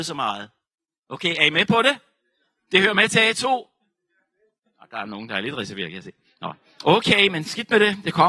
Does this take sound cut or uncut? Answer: uncut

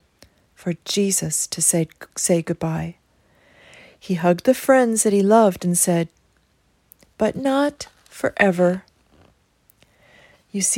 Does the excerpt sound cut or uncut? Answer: cut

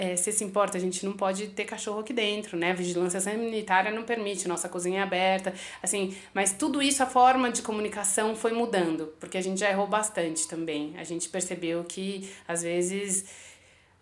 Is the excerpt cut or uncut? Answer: uncut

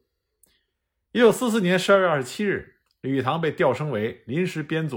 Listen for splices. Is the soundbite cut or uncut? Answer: uncut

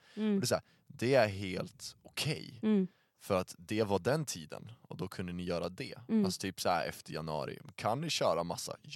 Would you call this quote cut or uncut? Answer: uncut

